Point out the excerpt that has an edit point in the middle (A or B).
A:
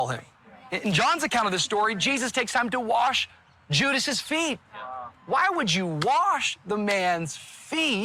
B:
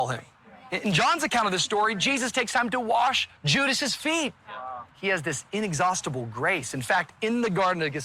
B